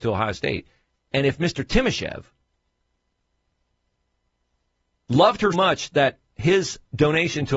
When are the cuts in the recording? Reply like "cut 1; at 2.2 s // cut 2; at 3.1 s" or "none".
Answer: cut 1; at 5.5 s